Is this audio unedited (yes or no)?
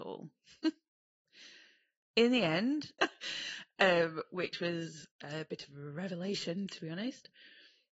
no